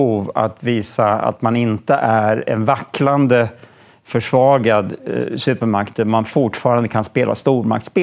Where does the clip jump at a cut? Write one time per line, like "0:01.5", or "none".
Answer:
none